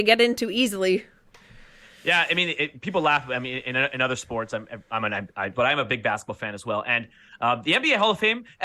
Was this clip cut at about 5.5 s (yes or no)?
yes